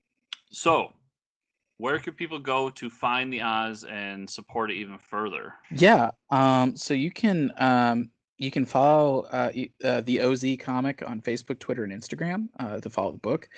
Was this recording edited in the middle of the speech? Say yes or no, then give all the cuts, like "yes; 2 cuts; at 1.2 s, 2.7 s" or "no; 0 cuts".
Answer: yes; 1 cut; at 5.6 s